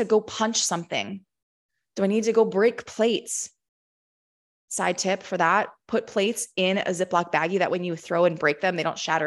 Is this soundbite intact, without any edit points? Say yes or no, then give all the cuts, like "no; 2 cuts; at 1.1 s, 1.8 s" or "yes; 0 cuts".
yes; 0 cuts